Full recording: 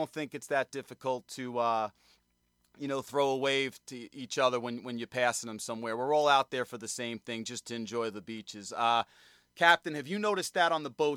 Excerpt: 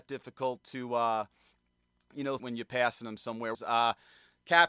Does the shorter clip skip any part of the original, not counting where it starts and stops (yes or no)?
yes